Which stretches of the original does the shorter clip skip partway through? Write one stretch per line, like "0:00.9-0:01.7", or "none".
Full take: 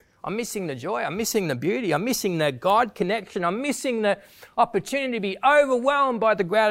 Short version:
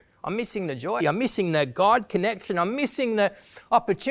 0:01.0-0:01.9